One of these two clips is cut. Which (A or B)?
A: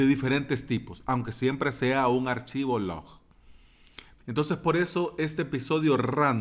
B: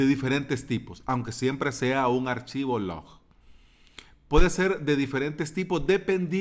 A